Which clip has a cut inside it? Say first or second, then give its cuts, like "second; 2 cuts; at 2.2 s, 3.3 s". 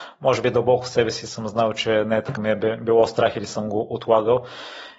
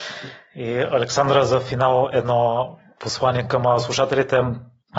first; 1 cut; at 2.4 s